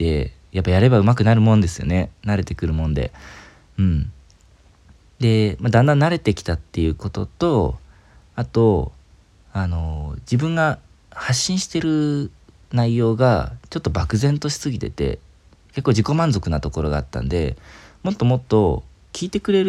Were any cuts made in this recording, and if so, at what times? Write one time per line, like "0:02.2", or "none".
none